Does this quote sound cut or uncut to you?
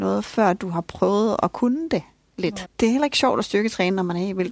cut